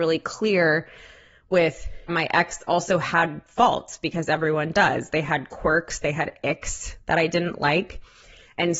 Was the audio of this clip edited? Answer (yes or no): yes